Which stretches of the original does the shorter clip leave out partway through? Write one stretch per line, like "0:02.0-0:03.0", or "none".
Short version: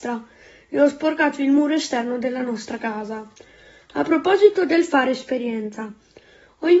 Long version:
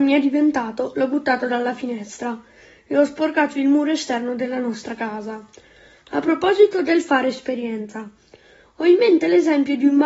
none